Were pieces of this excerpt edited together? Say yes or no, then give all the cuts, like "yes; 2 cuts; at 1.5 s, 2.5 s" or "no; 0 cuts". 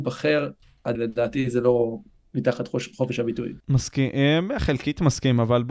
yes; 2 cuts; at 1.0 s, 3.6 s